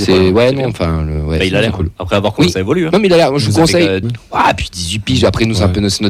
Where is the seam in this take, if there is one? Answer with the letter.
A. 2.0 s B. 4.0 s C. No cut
B